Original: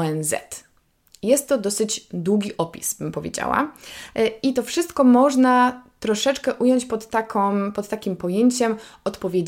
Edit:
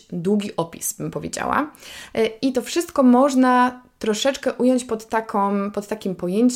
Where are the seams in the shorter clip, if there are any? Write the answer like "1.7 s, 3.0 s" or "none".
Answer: none